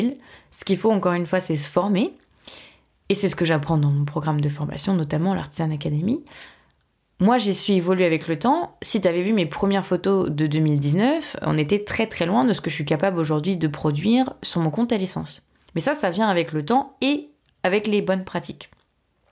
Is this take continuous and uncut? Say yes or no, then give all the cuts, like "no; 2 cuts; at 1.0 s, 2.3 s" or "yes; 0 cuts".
yes; 0 cuts